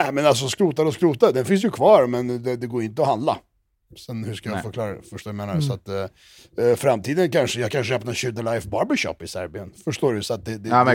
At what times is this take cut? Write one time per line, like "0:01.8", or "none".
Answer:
none